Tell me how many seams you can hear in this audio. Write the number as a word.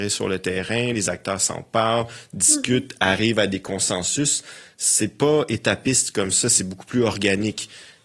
zero